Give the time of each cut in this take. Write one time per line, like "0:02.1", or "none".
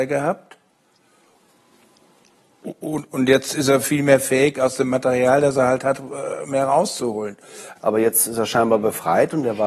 0:07.7